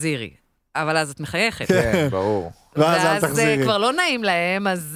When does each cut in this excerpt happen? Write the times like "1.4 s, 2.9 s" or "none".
none